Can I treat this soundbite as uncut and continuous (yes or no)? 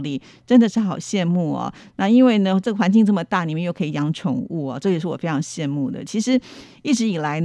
yes